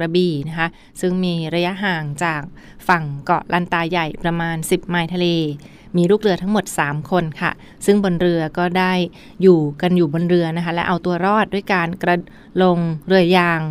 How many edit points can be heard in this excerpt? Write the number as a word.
one